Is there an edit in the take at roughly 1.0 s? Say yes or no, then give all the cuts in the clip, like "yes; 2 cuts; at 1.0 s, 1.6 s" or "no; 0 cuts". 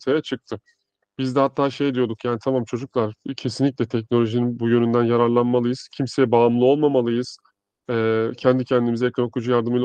yes; 1 cut; at 1.0 s